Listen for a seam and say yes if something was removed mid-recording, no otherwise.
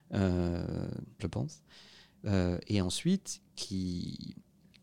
yes